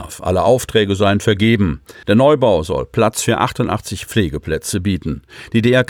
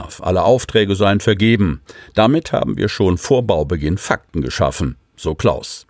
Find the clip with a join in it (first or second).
first